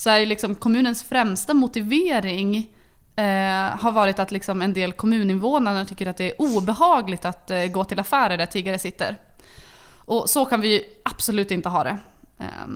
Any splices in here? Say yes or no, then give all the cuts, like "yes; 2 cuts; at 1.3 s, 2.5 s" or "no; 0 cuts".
no; 0 cuts